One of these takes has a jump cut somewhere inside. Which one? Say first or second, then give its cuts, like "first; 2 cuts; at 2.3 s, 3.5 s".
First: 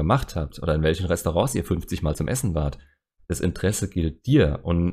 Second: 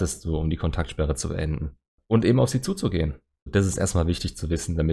second; 1 cut; at 3.5 s